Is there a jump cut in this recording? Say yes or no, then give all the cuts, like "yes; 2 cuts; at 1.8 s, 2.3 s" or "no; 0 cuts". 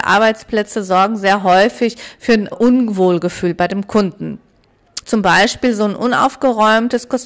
yes; 2 cuts; at 2.5 s, 5.0 s